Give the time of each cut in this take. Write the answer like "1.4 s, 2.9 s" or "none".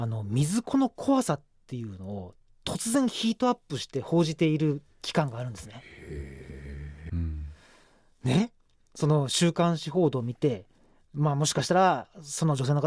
7.1 s